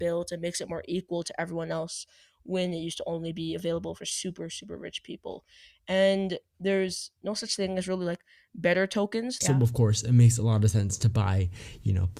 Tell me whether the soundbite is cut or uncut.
cut